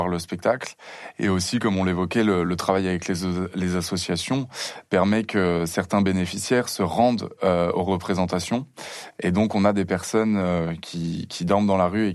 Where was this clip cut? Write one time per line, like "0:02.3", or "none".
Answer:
none